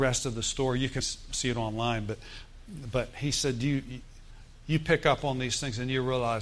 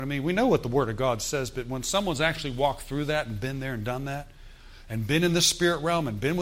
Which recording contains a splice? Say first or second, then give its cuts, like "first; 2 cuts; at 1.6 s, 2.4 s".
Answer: first; 1 cut; at 1.0 s